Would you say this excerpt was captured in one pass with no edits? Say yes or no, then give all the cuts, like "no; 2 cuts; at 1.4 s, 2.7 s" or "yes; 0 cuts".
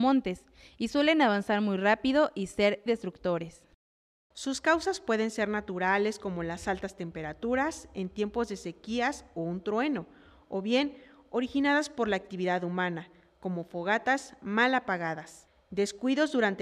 no; 1 cut; at 2.9 s